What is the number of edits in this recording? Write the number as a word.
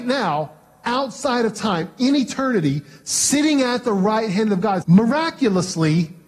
one